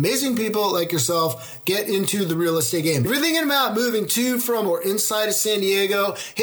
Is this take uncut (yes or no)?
yes